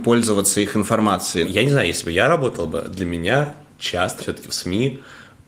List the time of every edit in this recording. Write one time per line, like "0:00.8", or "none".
0:01.4
0:04.2